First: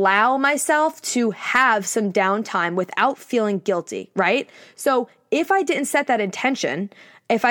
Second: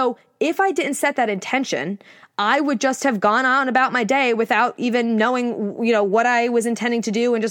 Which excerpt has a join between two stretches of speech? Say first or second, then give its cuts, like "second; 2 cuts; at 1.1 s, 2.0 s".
second; 1 cut; at 2.2 s